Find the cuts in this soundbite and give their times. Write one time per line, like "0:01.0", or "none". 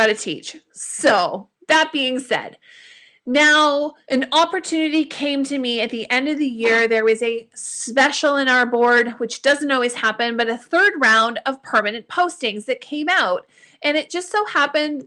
none